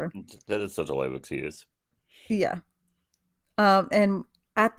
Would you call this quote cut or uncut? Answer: uncut